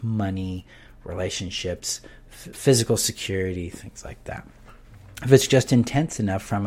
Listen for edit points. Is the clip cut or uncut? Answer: cut